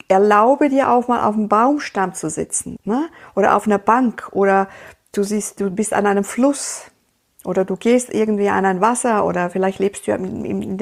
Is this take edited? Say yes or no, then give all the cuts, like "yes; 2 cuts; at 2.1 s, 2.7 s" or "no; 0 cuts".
yes; 1 cut; at 2.8 s